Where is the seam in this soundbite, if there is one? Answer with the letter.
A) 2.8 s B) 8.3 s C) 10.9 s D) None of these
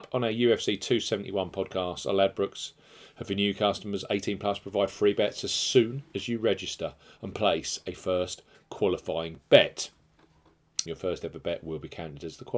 C